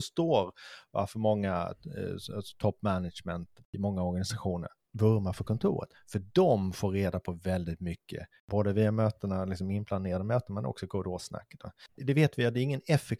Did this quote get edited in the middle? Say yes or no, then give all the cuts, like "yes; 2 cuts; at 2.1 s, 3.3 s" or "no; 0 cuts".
yes; 1 cut; at 11.9 s